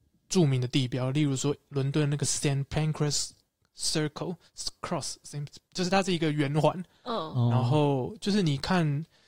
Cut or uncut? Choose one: uncut